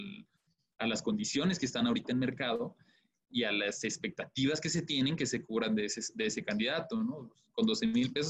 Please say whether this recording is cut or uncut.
uncut